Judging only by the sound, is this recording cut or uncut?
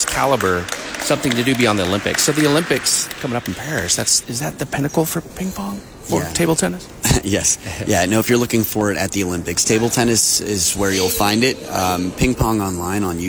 uncut